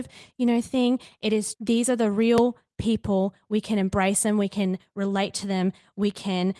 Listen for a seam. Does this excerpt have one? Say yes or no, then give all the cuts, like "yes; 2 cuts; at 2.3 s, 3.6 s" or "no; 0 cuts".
yes; 1 cut; at 1.5 s